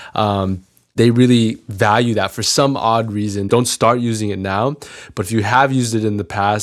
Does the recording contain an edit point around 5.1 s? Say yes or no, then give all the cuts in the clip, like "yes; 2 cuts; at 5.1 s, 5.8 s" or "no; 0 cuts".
no; 1 cut; at 3.5 s